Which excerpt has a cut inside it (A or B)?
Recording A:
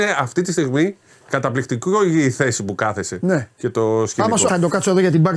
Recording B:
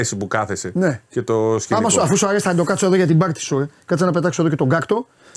A